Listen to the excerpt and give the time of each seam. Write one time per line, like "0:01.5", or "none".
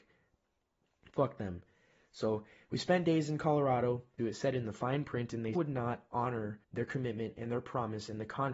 0:04.2
0:05.5
0:06.6